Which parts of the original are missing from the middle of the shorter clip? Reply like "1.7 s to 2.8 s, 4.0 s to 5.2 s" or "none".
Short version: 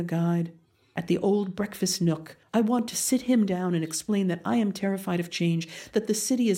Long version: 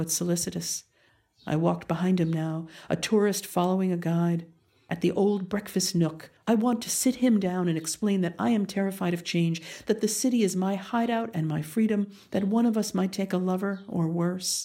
none